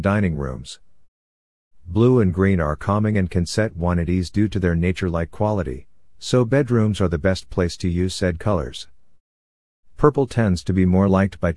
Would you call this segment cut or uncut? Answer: uncut